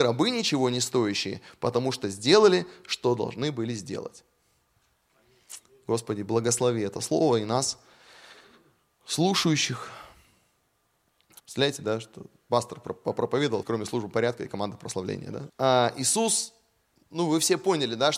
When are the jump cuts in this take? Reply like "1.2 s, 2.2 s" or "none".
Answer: 11.4 s, 13.6 s, 15.5 s